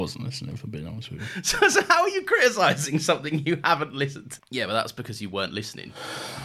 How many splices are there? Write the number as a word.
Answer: one